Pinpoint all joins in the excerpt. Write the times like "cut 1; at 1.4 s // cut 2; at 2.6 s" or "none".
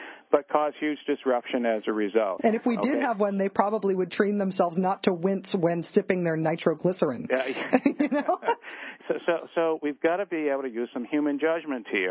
cut 1; at 2.4 s // cut 2; at 9.0 s